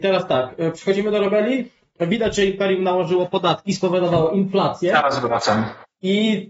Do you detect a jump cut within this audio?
no; 0 cuts

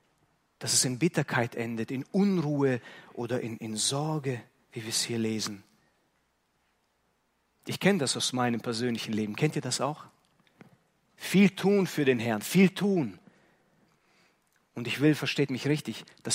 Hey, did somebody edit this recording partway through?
yes; 1 cut; at 7.5 s

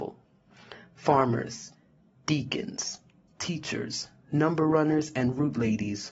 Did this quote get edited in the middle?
no; 0 cuts

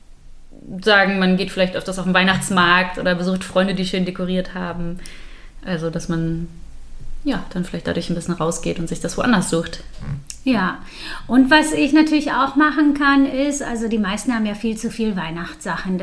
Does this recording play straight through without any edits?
yes; 0 cuts

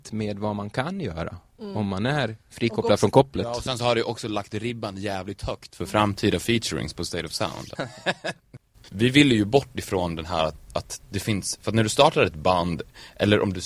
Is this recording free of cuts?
no; 1 cut; at 7.7 s

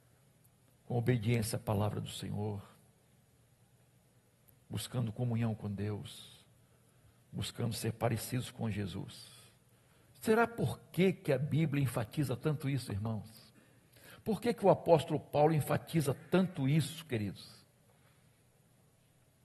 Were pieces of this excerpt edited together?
yes; 1 cut; at 10.1 s

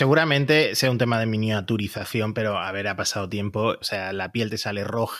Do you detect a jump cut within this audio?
yes; 1 cut; at 3.8 s

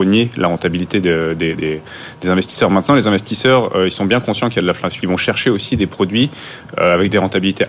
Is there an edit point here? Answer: yes; 1 cut; at 5.0 s

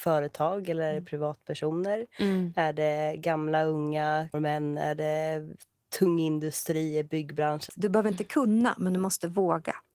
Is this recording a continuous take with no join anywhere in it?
no; 2 cuts; at 4.3 s, 7.7 s

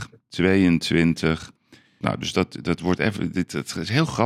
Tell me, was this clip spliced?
yes; 1 cut; at 2.0 s

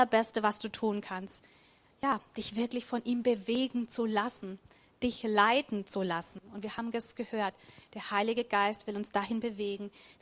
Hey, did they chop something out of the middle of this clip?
no; 0 cuts

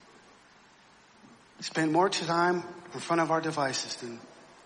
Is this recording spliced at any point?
no; 0 cuts

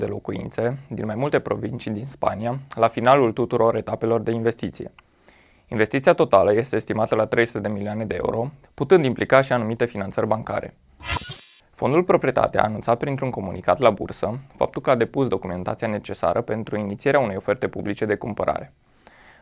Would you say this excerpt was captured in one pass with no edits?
no; 1 cut; at 8.7 s

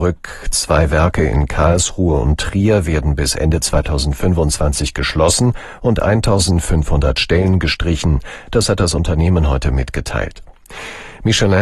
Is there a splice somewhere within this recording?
no; 0 cuts

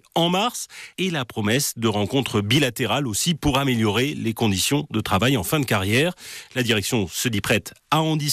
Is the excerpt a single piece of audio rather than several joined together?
yes; 0 cuts

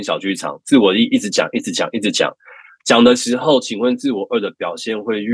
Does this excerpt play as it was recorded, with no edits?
yes; 0 cuts

